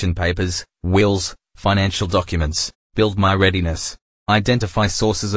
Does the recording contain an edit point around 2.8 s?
yes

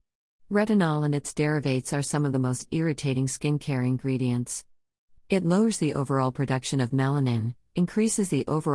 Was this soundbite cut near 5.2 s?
yes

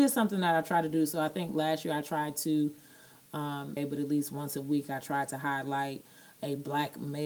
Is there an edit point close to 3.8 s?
yes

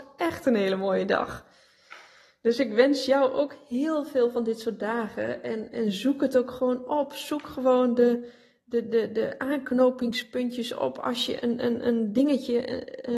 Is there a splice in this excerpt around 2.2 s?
no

